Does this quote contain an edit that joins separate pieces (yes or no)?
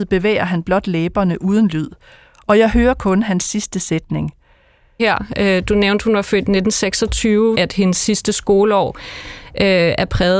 yes